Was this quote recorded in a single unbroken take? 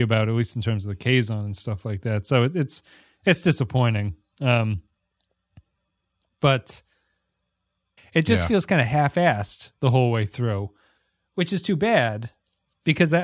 no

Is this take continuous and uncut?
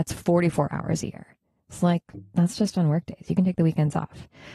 yes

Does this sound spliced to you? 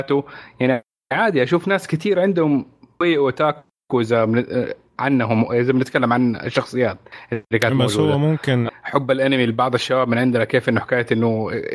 yes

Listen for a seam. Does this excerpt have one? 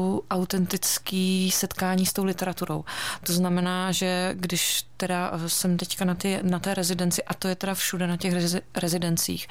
no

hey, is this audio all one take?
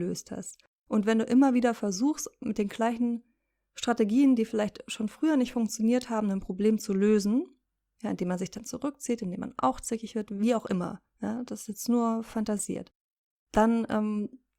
yes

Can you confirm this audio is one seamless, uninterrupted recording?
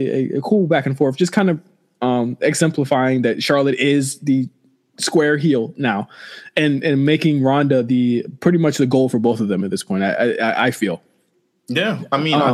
yes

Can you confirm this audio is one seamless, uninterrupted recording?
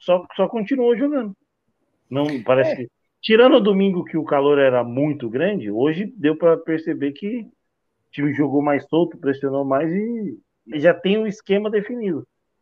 no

